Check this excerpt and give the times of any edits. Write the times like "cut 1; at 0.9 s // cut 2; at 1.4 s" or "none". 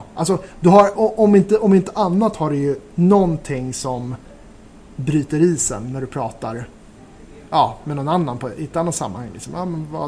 cut 1; at 1.0 s